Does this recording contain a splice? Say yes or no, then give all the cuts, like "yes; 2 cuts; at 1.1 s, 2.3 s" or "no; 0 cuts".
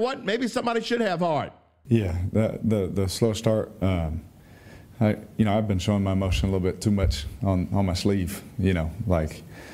yes; 1 cut; at 1.8 s